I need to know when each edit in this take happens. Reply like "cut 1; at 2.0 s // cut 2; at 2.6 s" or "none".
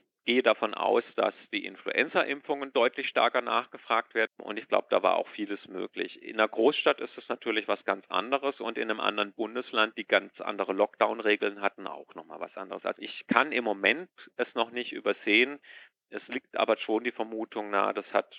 cut 1; at 4.3 s